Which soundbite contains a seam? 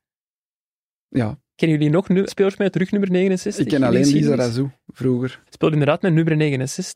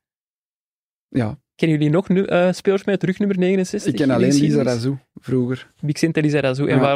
first; 2 cuts; at 2.3 s, 5.5 s

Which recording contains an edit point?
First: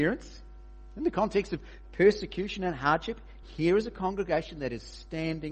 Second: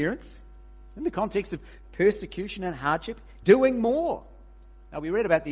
second; 1 cut; at 3.4 s

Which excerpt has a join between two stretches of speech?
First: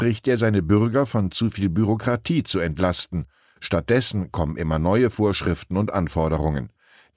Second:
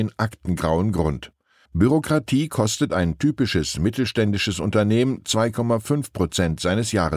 second; 1 cut; at 1.7 s

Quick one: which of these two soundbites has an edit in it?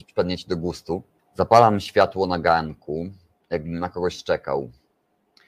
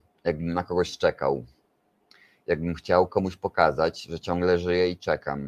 first; 1 cut; at 1.2 s

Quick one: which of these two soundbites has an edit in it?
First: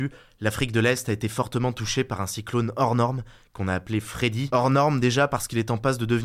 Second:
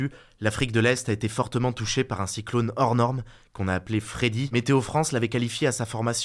second; 1 cut; at 4.5 s

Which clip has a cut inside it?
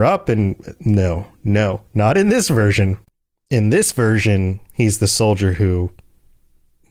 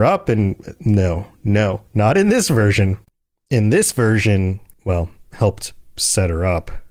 second; 1 cut; at 4.7 s

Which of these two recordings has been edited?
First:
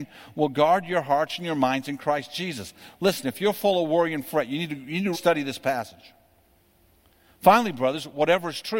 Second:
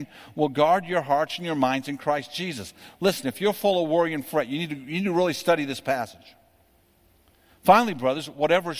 first; 1 cut; at 5.1 s

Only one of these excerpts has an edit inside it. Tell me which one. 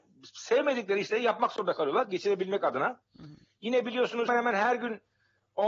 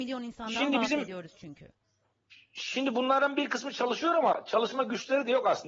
first; 1 cut; at 4.3 s

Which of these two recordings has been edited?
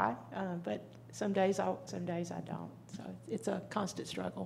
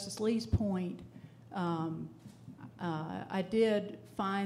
first; 1 cut; at 1.9 s

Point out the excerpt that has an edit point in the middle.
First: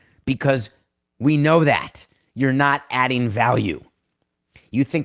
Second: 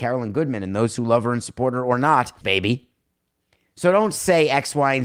second; 1 cut; at 2.4 s

